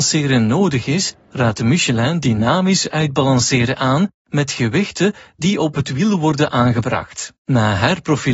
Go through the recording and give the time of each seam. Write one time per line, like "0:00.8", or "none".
0:07.4